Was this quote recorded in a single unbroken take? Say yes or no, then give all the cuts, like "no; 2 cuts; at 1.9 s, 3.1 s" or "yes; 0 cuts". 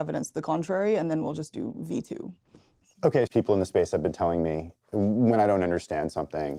no; 1 cut; at 3.3 s